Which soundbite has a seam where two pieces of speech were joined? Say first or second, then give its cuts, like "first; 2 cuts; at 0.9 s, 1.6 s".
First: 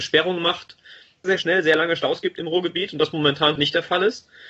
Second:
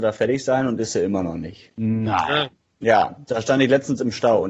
first; 2 cuts; at 1.2 s, 3.6 s